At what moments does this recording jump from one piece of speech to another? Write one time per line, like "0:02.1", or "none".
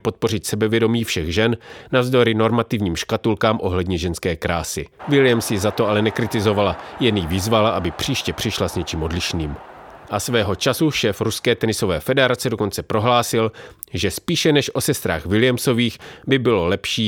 0:05.0
0:10.0